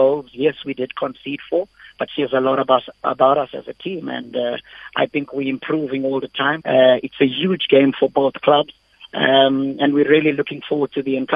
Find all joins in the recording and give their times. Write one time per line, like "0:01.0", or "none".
0:02.1
0:06.6